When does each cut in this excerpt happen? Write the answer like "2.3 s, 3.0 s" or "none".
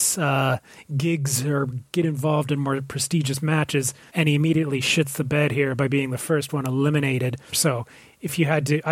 4.1 s, 7.5 s

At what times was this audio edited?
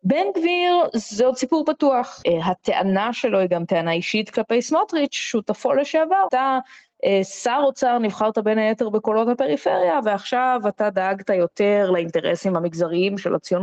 2.2 s, 6.3 s

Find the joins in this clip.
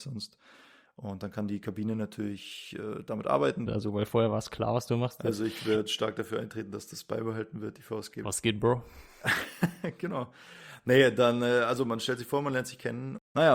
3.7 s, 8.2 s

